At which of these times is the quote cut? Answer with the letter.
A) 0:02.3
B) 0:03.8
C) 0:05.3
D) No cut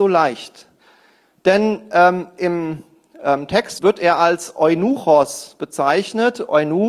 B